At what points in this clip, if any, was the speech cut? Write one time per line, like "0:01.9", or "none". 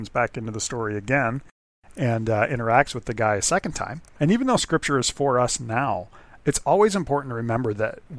0:04.2